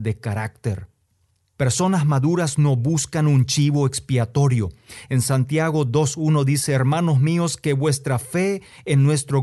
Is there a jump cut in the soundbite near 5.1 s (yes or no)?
yes